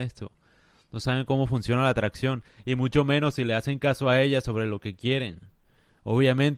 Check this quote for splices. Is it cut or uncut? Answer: uncut